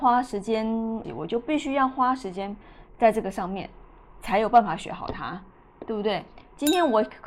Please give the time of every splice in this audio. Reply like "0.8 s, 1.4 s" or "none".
1.0 s